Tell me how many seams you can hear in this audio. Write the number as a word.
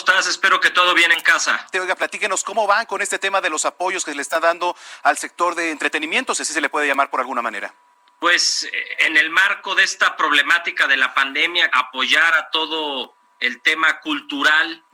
two